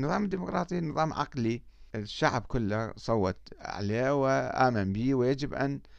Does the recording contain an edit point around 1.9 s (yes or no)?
yes